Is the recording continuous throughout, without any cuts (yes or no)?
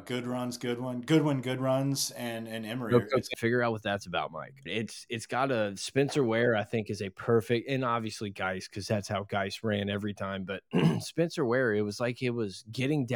no